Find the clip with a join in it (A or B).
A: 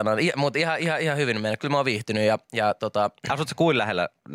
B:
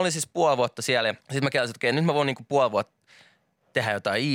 B